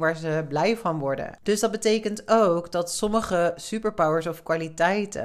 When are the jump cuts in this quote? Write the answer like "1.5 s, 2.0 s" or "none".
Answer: 1.4 s